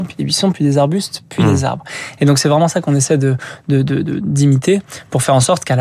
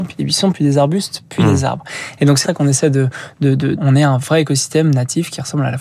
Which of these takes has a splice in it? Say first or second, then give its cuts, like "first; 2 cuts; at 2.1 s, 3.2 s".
second; 2 cuts; at 2.4 s, 3.7 s